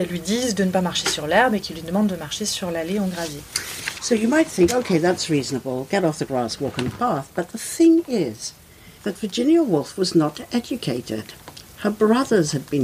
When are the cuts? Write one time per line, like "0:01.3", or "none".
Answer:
0:09.0